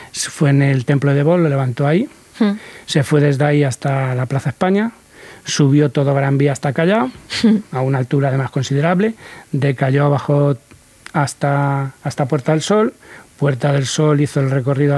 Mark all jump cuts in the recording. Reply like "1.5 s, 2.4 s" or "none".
none